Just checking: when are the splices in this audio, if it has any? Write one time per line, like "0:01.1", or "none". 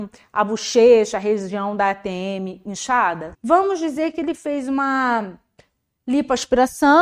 0:03.3